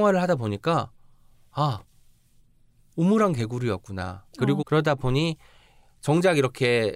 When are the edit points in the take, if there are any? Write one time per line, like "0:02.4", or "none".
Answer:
0:04.6